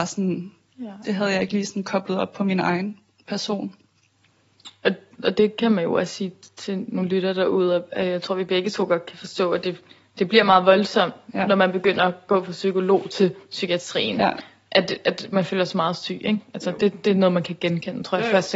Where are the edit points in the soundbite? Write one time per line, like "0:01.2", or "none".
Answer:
none